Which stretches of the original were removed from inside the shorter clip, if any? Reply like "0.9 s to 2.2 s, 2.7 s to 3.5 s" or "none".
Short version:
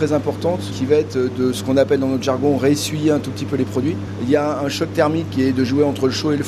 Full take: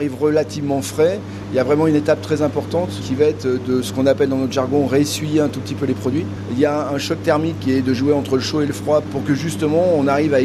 none